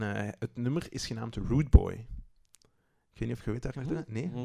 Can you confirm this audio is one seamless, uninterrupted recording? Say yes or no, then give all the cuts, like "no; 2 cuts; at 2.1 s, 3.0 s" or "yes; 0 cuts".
yes; 0 cuts